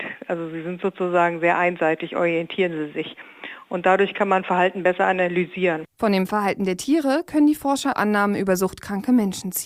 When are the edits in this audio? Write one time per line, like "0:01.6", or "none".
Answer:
0:07.9